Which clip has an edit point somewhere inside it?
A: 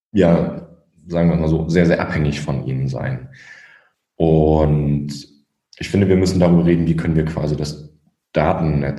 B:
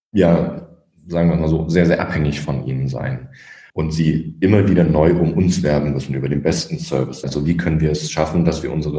B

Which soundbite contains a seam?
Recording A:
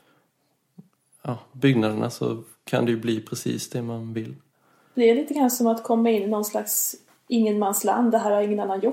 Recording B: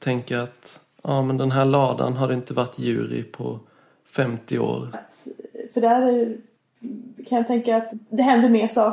B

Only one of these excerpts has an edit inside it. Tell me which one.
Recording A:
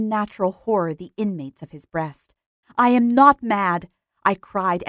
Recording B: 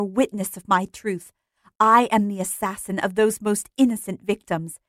A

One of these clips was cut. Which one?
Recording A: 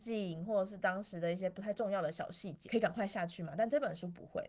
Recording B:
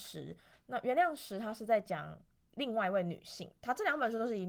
A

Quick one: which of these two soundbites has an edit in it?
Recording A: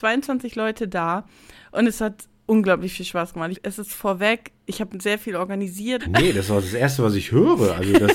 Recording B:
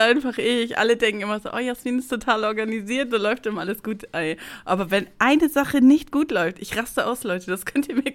A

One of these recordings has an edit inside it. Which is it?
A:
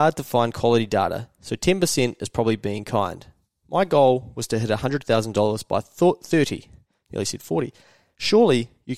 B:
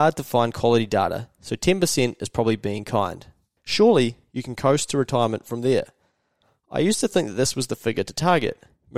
B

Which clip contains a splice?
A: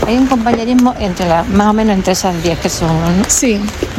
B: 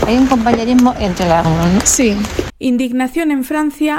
B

